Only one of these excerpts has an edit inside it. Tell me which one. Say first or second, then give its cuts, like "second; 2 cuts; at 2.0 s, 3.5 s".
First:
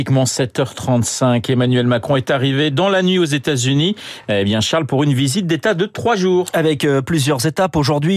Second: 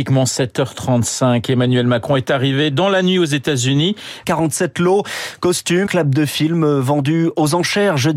second; 2 cuts; at 4.2 s, 5.9 s